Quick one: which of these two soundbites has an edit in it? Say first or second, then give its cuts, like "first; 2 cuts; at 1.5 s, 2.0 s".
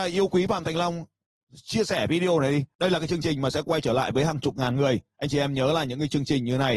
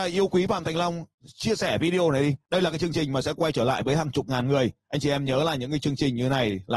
second; 1 cut; at 1.1 s